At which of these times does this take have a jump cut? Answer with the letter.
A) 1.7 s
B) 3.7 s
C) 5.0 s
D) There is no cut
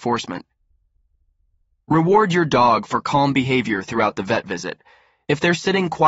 D